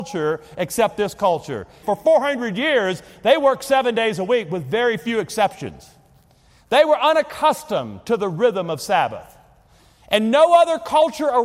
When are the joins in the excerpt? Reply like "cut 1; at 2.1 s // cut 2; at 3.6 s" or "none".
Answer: cut 1; at 1.8 s